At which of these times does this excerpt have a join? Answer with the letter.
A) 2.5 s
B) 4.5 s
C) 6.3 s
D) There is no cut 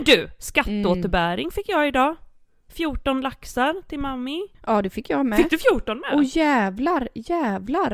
B